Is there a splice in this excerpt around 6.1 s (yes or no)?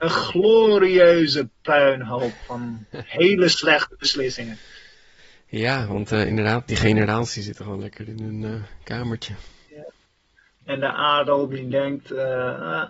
no